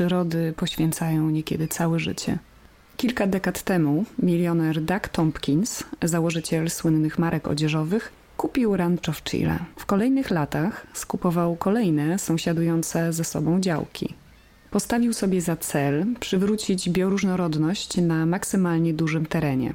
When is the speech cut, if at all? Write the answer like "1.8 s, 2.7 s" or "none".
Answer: 9.7 s